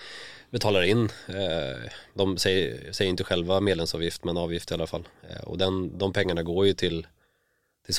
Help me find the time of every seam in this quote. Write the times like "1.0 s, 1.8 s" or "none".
none

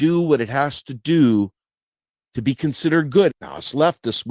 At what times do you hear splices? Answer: 3.3 s

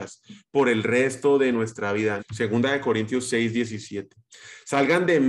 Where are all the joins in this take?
2.2 s

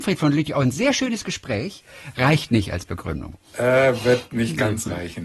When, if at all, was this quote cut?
none

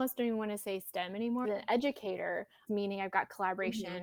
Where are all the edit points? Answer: 1.4 s, 2.7 s

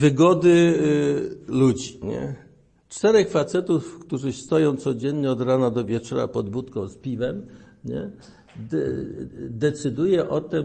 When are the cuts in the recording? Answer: none

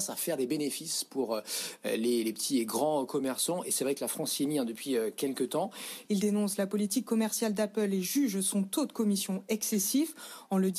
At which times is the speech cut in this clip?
6.1 s

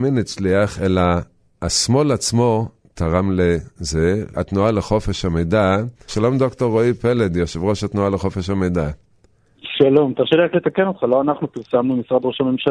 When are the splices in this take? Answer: 4.3 s, 6.1 s

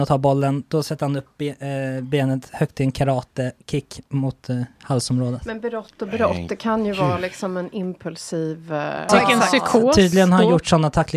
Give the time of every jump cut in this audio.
9.1 s

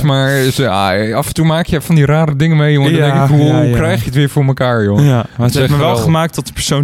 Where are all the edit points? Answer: none

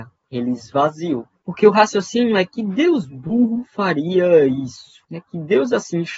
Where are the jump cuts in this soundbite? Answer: none

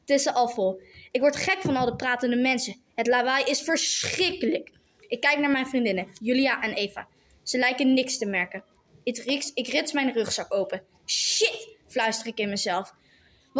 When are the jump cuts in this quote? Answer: none

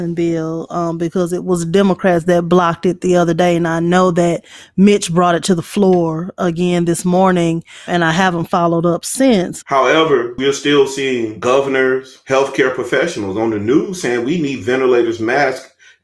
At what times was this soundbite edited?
7.9 s, 9.6 s

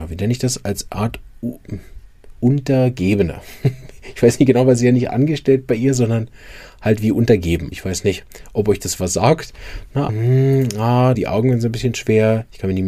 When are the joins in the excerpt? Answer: 7.7 s, 10.1 s, 11.1 s

